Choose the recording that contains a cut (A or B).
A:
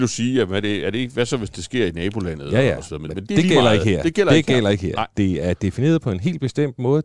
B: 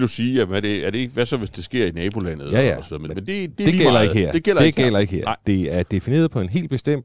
A